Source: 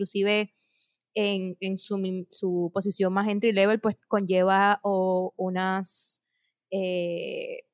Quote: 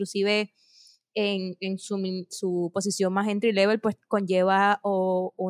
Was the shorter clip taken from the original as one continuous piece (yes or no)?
yes